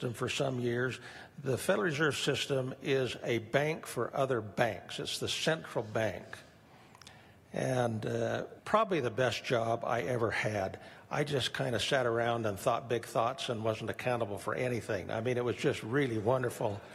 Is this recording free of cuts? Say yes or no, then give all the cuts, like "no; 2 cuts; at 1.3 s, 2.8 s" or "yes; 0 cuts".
no; 1 cut; at 8.6 s